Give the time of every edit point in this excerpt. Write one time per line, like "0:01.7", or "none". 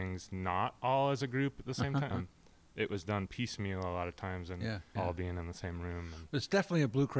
0:02.1
0:05.0